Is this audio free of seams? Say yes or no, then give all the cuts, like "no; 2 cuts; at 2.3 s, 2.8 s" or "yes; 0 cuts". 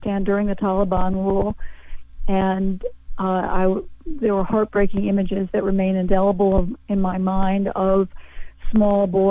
yes; 0 cuts